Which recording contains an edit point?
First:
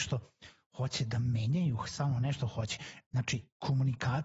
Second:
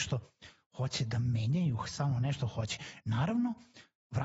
first; 1 cut; at 3.0 s

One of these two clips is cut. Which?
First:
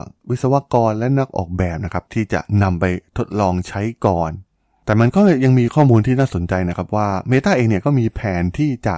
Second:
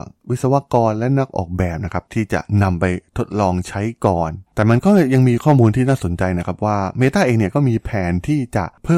second; 1 cut; at 4.5 s

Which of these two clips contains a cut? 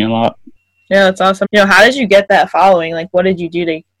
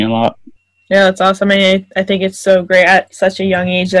first; 1 cut; at 1.4 s

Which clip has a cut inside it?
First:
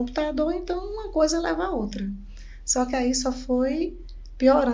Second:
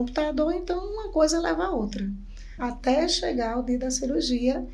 second; 1 cut; at 2.6 s

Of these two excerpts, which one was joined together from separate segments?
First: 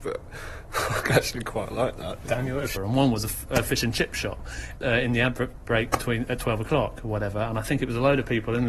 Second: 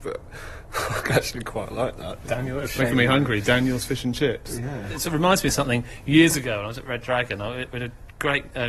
first; 2 cuts; at 2.8 s, 4.8 s

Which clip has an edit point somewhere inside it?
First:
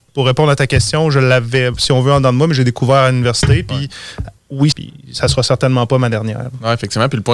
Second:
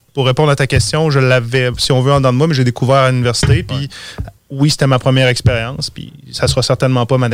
first; 1 cut; at 4.7 s

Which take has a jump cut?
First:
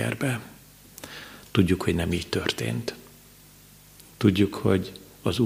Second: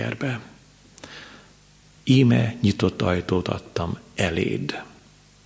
first; 1 cut; at 1.4 s

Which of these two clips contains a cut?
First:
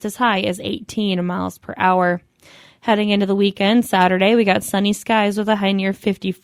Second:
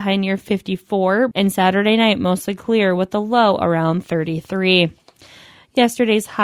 second; 1 cut; at 1.3 s

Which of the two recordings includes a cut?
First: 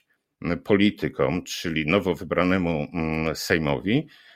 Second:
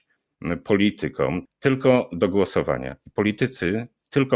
second; 1 cut; at 1.5 s

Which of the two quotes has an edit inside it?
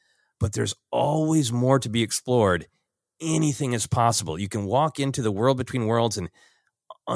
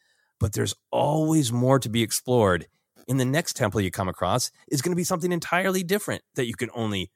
second; 1 cut; at 3.0 s

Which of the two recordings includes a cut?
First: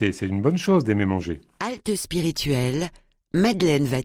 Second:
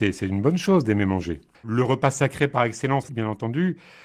second; 2 cuts; at 1.5 s, 3.1 s

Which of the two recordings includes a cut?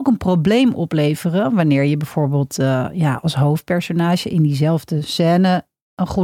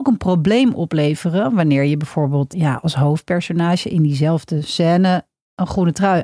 second; 1 cut; at 2.5 s

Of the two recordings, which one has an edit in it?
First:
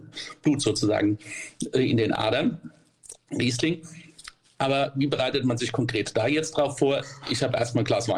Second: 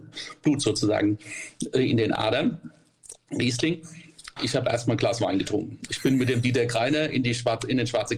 second; 1 cut; at 4.4 s

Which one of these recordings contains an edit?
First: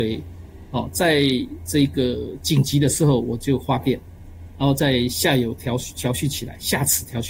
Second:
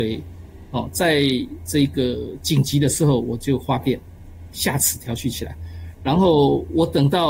second; 1 cut; at 4.5 s

